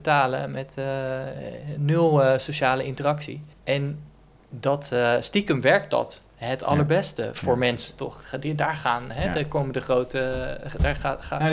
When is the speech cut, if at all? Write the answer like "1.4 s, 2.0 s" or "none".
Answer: 3.5 s